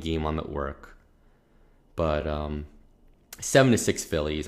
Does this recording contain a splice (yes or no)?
no